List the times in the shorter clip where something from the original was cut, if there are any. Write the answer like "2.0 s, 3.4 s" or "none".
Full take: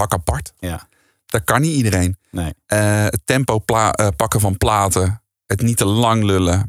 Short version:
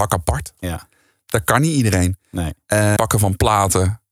3.0 s